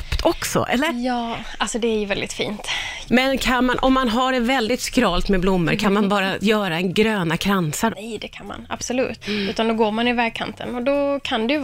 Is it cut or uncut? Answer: cut